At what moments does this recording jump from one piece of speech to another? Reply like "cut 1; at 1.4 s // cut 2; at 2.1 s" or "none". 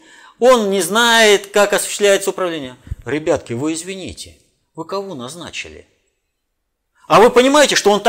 none

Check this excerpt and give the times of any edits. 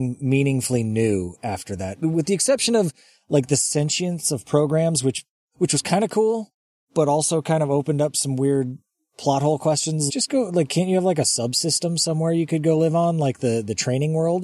cut 1; at 10.1 s

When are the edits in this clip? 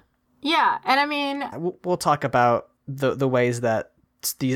cut 1; at 1.5 s // cut 2; at 2.8 s

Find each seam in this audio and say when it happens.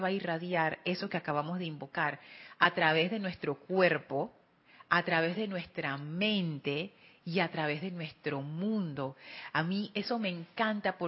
none

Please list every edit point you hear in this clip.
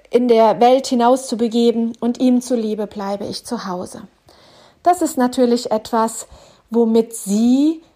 none

